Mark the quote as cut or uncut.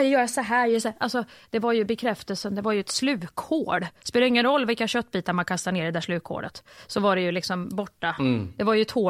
uncut